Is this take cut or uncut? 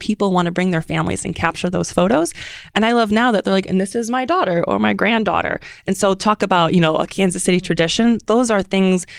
uncut